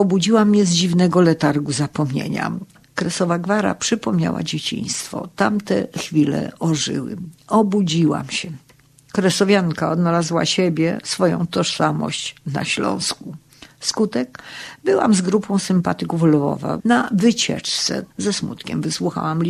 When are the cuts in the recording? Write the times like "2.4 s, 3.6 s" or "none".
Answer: 16.8 s, 18.1 s